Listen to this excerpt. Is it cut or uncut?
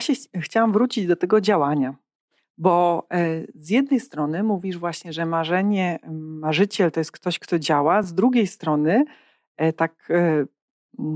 uncut